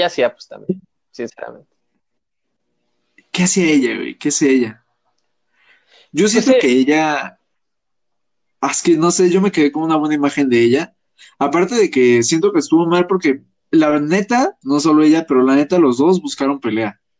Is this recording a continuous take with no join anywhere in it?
no; 1 cut; at 14.6 s

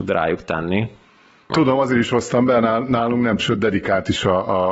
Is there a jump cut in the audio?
yes; 2 cuts; at 1.5 s, 3.4 s

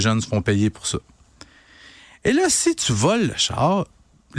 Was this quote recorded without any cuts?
yes; 0 cuts

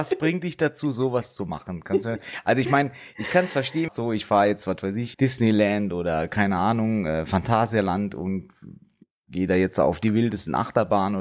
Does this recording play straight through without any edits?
no; 2 cuts; at 3.9 s, 5.1 s

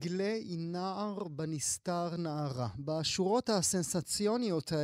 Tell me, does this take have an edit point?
no; 0 cuts

